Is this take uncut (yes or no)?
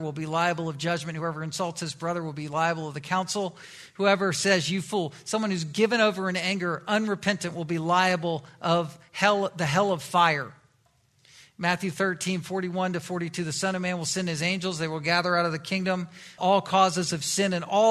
no